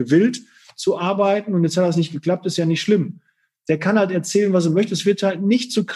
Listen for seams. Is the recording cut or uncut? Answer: uncut